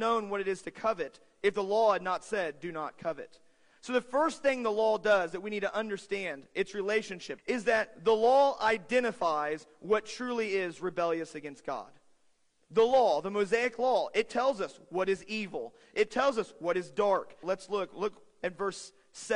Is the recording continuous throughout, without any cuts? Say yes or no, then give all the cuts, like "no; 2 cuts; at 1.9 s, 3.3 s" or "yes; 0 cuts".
no; 2 cuts; at 7.4 s, 17.4 s